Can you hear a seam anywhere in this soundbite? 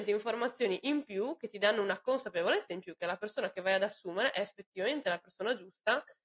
no; 0 cuts

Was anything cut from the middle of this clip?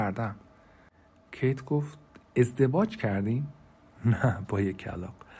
yes; 1 cut; at 3.9 s

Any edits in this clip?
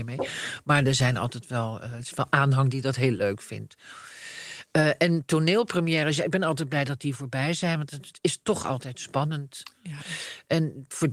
no; 0 cuts

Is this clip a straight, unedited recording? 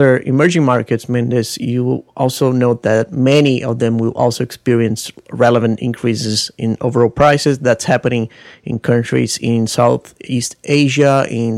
yes; 0 cuts

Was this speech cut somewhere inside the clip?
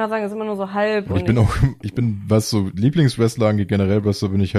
no; 0 cuts

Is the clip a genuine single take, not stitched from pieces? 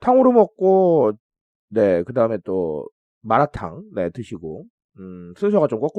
yes; 0 cuts

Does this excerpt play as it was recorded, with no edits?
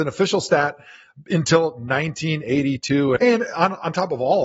no; 1 cut; at 3.2 s

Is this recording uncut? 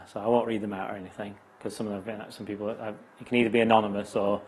yes; 0 cuts

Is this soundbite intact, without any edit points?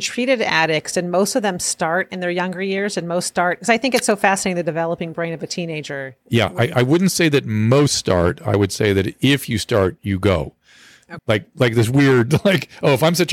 no; 2 cuts; at 6.2 s, 11.2 s

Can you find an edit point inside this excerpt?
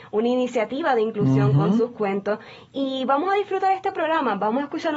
no; 0 cuts

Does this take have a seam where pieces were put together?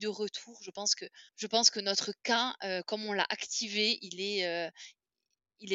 yes; 1 cut; at 1.3 s

